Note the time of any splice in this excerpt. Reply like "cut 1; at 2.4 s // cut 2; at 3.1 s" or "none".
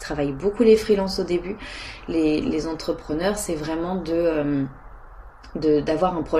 none